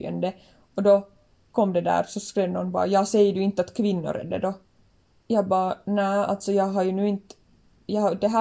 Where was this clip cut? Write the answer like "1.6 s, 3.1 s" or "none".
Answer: none